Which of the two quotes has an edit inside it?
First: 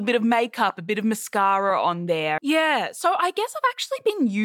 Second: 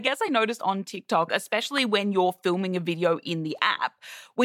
first; 1 cut; at 2.4 s

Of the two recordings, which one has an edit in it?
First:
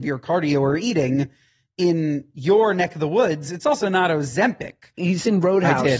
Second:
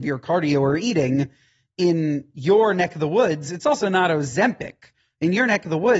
first; 1 cut; at 5.0 s

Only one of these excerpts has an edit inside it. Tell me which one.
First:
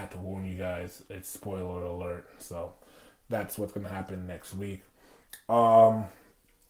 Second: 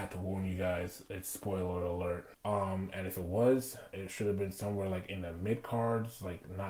second; 1 cut; at 2.3 s

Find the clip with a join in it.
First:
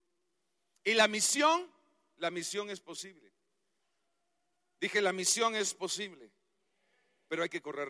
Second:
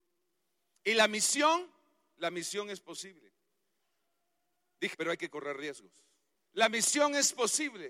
second; 2 cuts; at 4.9 s, 6.3 s

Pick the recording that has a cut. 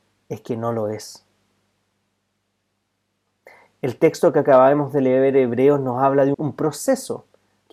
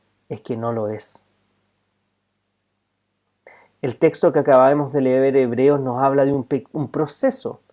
first; 1 cut; at 6.3 s

